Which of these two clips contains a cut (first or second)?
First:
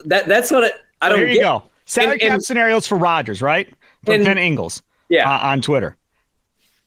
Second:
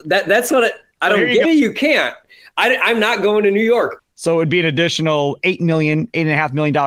second